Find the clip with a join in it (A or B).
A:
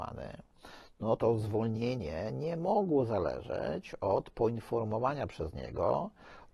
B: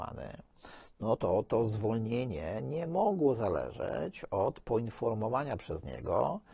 A